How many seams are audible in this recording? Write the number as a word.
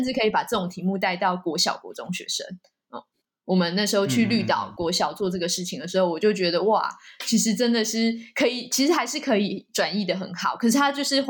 zero